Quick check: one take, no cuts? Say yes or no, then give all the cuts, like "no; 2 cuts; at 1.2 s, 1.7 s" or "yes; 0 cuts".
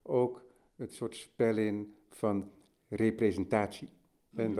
yes; 0 cuts